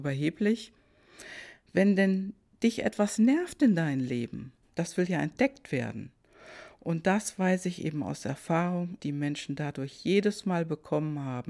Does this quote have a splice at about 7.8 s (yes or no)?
no